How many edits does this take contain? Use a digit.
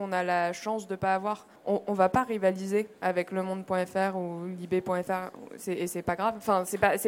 1